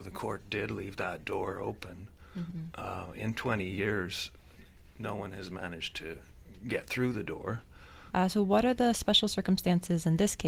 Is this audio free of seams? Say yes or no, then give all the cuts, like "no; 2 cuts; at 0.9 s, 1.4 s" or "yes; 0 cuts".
no; 1 cut; at 8.1 s